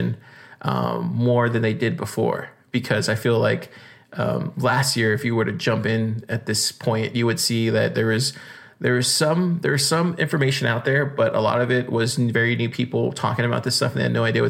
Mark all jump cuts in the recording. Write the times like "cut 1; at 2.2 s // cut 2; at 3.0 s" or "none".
none